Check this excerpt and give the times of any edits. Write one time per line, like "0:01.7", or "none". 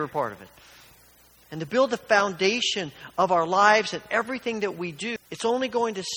0:01.3
0:05.2